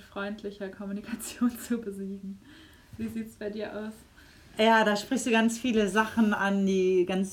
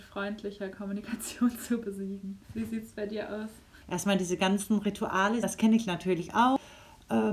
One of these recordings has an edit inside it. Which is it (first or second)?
second